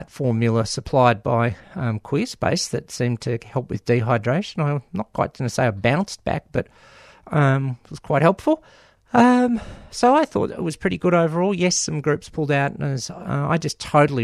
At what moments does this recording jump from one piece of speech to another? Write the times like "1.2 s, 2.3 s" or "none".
9.0 s